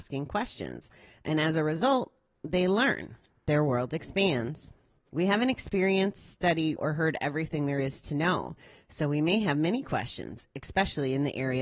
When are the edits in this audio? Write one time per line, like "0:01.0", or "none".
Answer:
0:05.1
0:06.8